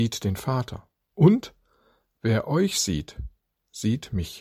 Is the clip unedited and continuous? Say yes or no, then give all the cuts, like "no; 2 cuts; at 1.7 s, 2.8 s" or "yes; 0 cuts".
yes; 0 cuts